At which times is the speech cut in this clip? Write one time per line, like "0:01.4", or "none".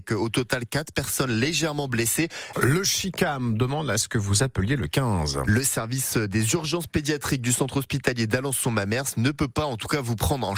0:02.5